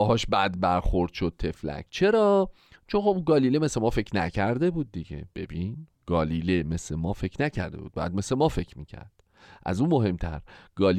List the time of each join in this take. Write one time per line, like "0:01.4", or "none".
0:05.9

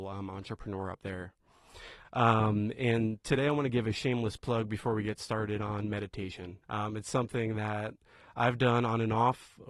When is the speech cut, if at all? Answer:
0:02.0
0:06.6

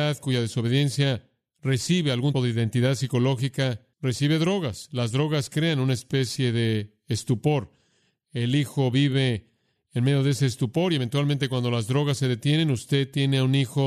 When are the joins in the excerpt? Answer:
0:02.3
0:03.9

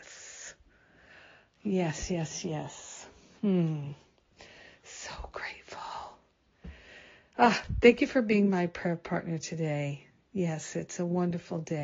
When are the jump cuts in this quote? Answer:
none

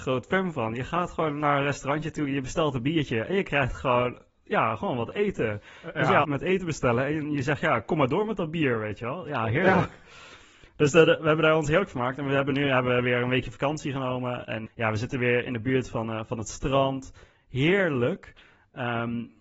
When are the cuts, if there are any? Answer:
0:06.2
0:14.7

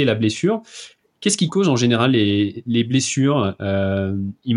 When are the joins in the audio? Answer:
none

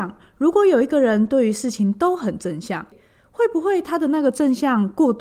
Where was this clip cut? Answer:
none

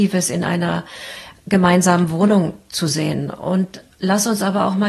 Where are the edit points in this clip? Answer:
none

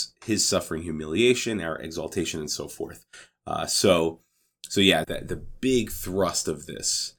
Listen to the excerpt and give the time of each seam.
0:05.0

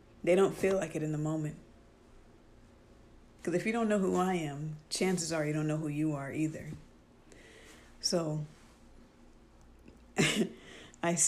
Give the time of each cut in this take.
0:03.4

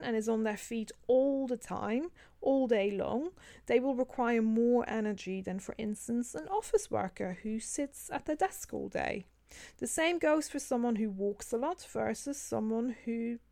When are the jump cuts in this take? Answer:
none

